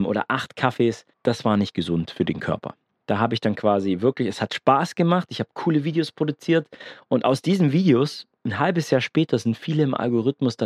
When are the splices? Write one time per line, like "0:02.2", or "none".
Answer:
none